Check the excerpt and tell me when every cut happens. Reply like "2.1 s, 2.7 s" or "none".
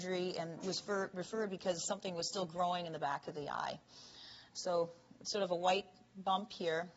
4.5 s